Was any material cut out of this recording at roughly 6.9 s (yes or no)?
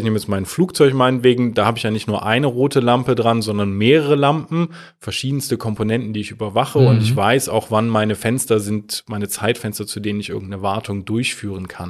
no